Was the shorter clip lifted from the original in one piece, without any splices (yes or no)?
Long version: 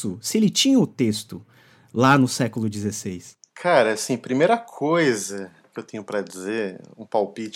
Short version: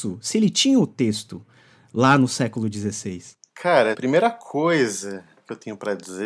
no